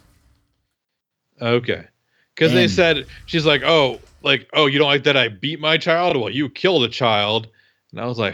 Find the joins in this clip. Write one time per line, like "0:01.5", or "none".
none

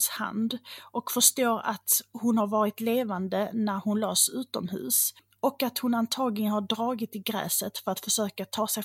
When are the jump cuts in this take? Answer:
none

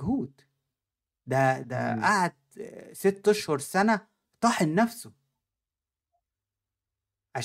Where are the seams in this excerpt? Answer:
0:01.6

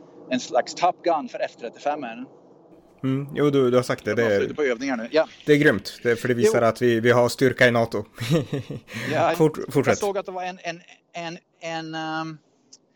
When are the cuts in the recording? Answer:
0:09.3

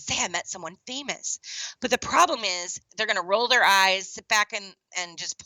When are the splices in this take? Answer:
0:02.9

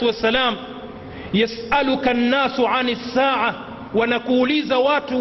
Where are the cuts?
none

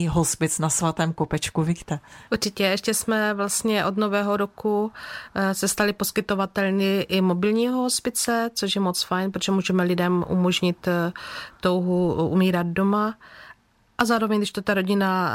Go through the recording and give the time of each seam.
0:02.3

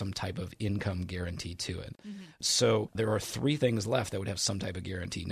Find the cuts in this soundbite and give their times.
0:02.0

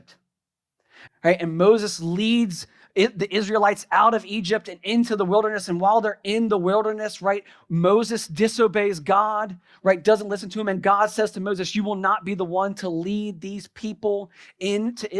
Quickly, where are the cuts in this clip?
0:01.1

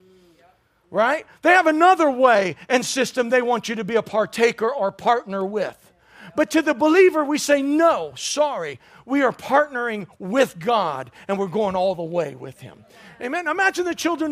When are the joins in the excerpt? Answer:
none

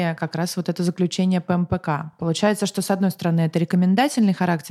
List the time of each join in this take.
none

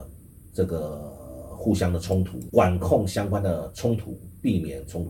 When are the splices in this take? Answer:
0:02.5

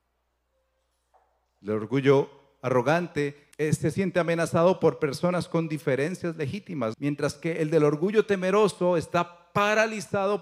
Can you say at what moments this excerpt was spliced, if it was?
0:03.5
0:06.9

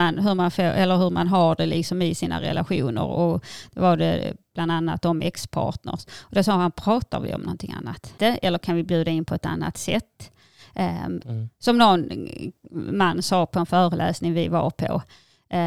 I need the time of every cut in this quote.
0:08.2
0:11.2

